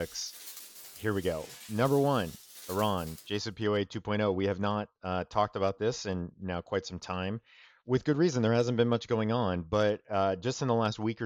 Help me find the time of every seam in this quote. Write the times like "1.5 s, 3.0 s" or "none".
none